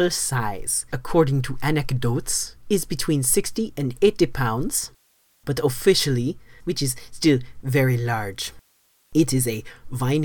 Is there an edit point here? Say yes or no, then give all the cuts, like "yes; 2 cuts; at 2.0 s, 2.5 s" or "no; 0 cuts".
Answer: yes; 3 cuts; at 0.9 s, 6.6 s, 7.6 s